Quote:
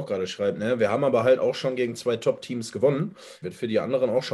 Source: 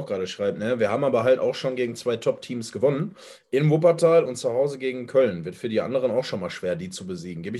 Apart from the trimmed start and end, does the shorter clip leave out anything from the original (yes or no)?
yes